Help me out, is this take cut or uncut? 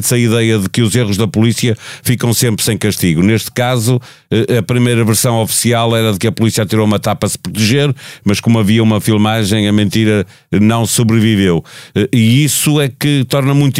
uncut